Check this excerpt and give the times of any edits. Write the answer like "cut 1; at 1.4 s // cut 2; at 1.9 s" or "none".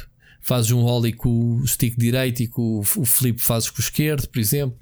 none